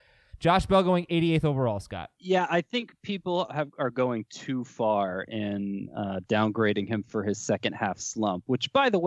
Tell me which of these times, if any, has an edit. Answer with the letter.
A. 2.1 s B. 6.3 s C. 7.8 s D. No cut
A